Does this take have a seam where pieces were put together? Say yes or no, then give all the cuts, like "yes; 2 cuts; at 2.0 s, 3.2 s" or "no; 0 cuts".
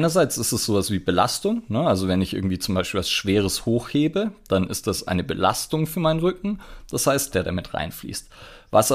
yes; 1 cut; at 7.3 s